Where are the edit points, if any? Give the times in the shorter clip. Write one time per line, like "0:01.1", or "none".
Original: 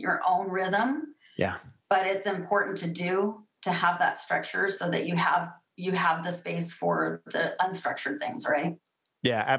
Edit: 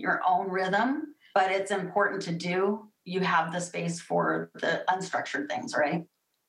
0:01.3
0:03.0